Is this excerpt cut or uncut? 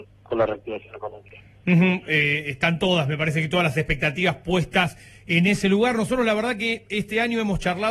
uncut